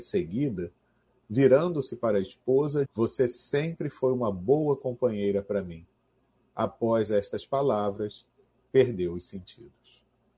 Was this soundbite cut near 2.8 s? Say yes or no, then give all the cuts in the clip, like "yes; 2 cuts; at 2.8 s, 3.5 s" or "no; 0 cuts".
yes; 1 cut; at 2.8 s